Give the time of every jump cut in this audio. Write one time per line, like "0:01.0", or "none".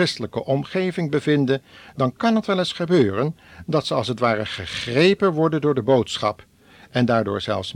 none

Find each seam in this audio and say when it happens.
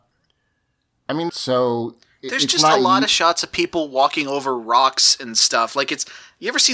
0:01.3

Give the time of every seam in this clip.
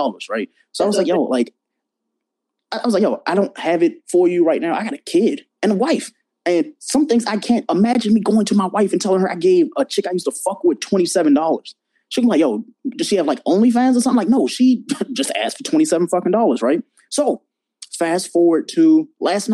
none

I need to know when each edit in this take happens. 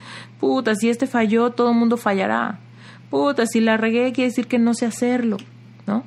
none

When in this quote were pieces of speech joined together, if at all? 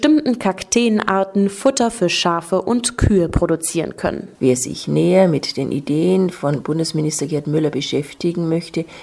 none

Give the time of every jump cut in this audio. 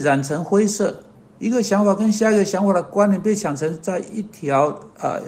none

